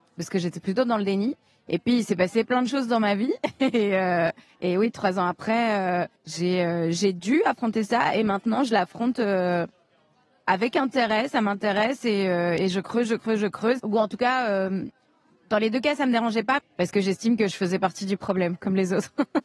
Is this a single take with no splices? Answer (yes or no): no